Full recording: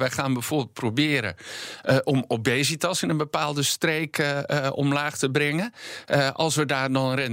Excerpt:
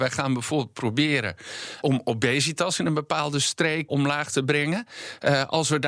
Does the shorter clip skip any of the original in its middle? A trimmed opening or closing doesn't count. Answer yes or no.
yes